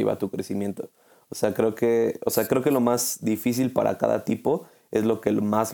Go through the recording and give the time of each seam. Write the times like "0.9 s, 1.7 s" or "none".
none